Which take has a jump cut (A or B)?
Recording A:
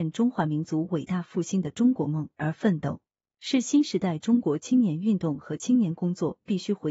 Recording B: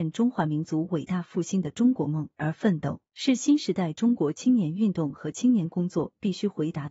B